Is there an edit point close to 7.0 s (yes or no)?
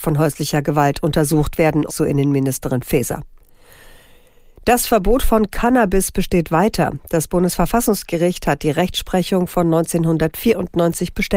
no